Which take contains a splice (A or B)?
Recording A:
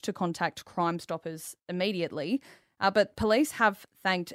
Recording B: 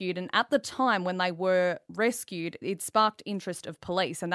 B